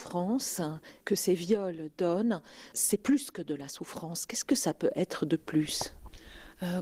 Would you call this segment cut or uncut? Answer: uncut